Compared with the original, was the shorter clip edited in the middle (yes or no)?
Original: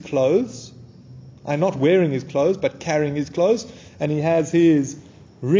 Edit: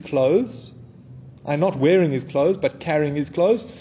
no